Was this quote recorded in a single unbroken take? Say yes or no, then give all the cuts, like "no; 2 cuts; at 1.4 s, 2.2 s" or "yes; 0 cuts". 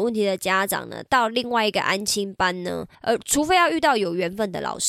no; 1 cut; at 2.9 s